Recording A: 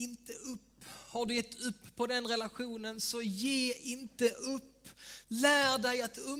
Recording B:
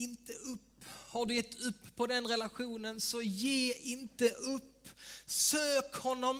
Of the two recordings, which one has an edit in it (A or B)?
A